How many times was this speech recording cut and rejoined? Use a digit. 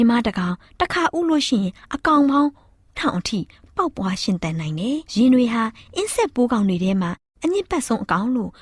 2